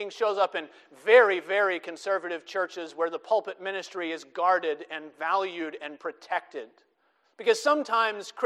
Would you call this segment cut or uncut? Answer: cut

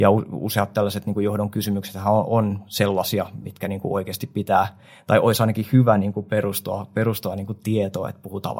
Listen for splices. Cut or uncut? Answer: uncut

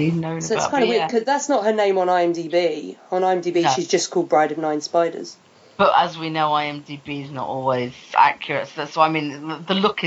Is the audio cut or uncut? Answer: uncut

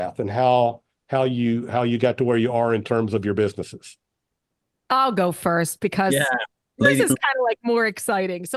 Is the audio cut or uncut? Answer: cut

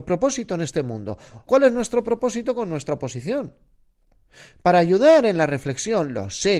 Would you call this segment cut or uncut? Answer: cut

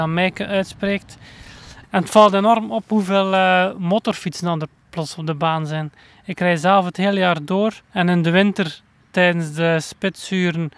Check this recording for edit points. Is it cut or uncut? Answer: cut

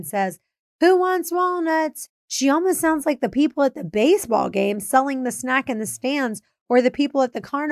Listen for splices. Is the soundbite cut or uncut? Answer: cut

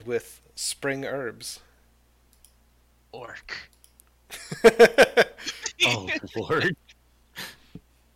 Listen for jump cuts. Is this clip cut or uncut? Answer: uncut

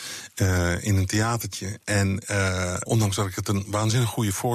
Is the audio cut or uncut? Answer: cut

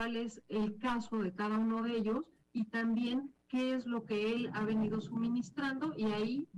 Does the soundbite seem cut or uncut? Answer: uncut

